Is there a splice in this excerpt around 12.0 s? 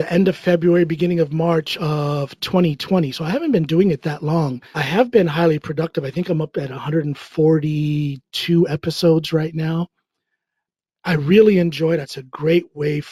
yes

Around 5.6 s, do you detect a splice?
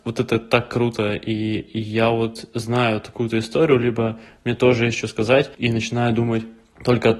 yes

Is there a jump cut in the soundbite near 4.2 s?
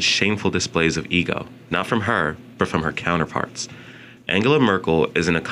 yes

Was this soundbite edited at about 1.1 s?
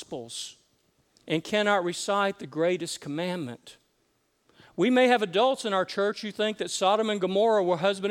yes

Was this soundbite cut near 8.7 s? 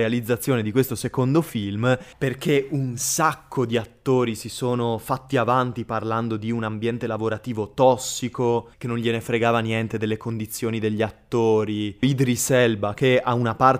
yes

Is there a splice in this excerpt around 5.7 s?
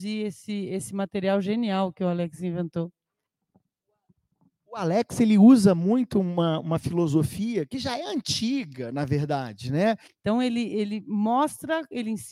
no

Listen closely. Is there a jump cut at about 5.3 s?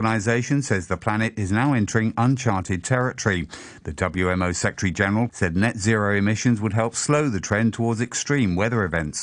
yes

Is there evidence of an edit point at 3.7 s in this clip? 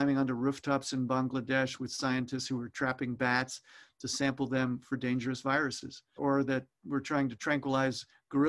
no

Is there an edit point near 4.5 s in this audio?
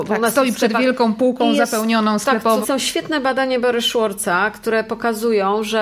no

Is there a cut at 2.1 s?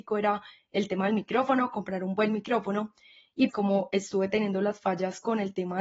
no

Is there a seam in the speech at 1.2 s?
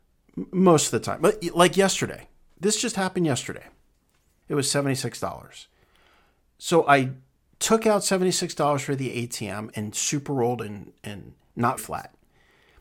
no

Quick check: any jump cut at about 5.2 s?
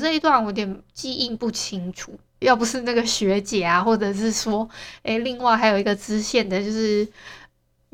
no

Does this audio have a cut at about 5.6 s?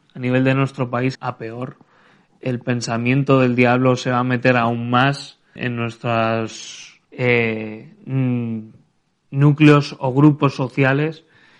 yes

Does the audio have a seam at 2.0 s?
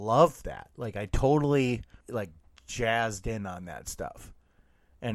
yes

